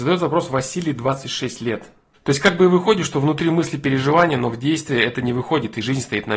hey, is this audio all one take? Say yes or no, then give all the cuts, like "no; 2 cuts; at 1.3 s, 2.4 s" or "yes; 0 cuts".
no; 1 cut; at 2.1 s